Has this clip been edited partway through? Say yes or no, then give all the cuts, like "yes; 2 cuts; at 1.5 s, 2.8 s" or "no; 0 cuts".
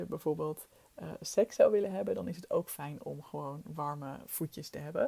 no; 0 cuts